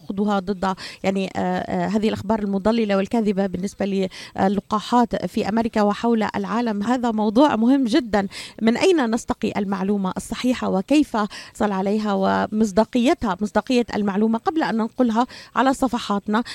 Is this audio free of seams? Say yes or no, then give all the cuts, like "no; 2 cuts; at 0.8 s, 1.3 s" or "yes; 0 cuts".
no; 2 cuts; at 6.8 s, 11.5 s